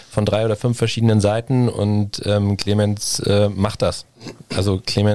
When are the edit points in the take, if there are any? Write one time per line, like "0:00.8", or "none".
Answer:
none